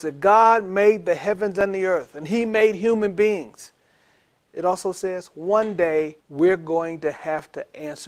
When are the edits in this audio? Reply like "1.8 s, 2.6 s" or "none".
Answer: 4.5 s, 6.2 s

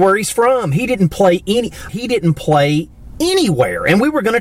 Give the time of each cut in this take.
1.9 s

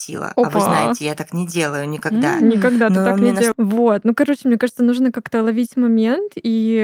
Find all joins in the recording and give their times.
3.5 s

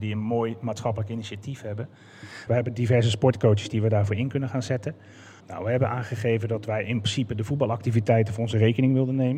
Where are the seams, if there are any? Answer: 2.5 s, 5.4 s

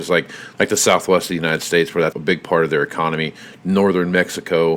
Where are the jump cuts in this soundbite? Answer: 2.1 s

